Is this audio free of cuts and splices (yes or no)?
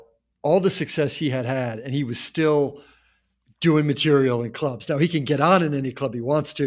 yes